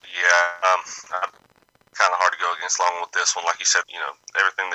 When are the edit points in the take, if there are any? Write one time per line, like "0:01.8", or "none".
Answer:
0:03.8